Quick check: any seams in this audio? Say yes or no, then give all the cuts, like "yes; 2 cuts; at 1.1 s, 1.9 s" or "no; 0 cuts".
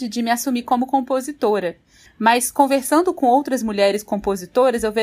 yes; 1 cut; at 2.1 s